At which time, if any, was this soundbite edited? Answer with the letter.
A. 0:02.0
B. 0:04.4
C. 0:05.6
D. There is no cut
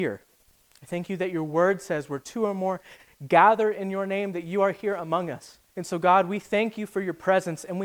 C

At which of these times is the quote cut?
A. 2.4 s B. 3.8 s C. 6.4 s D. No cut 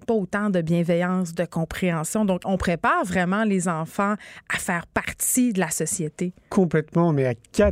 A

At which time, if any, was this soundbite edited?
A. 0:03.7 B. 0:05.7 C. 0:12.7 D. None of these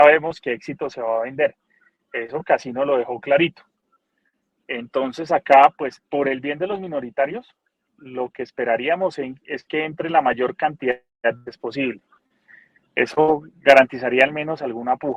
D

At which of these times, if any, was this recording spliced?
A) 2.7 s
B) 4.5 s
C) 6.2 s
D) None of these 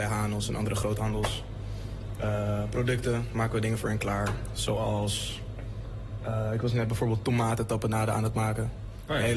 D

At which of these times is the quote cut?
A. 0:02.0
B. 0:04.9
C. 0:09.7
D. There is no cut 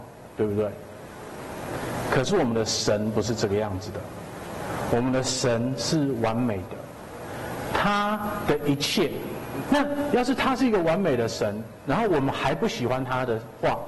C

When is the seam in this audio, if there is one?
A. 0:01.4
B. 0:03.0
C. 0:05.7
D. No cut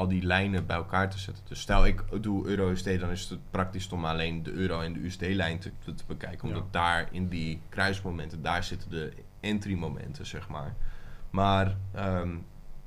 C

